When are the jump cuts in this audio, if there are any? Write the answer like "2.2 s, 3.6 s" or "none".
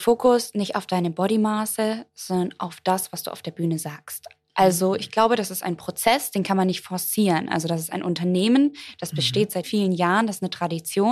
9.6 s

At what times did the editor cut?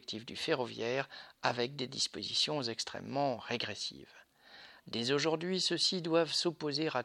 4.8 s

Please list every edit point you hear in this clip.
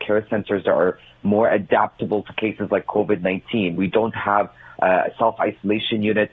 none

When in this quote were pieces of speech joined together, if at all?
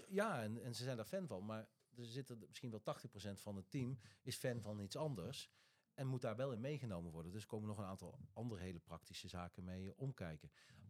none

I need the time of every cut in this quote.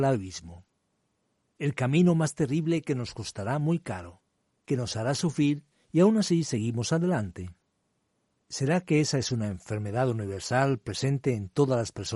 none

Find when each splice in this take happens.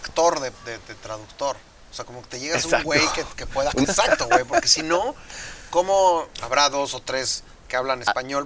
3.8 s, 6.4 s

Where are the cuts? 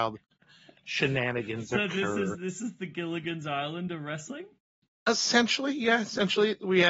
none

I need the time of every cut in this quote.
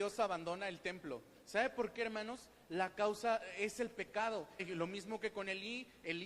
4.6 s

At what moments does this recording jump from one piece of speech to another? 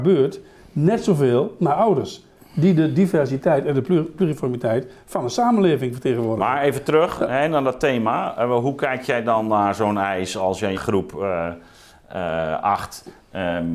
10.7 s

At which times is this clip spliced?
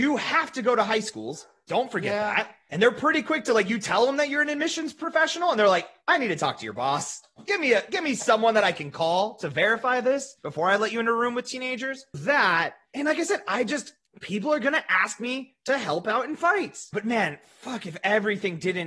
12.1 s, 16.9 s

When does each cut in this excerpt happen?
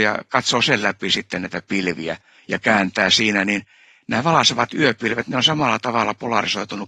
none

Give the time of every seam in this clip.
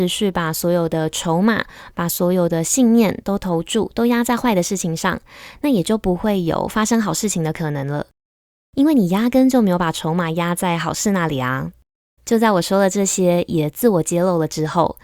12.2 s

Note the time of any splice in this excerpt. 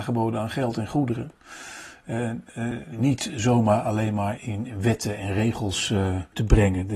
2.9 s, 4.4 s

